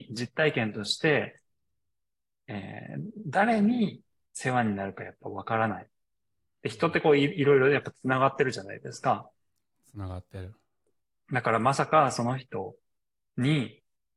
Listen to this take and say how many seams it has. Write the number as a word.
zero